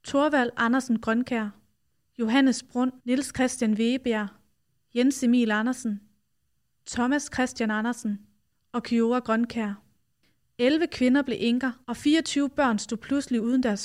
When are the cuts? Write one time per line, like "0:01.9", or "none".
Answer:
0:03.0
0:10.4
0:11.8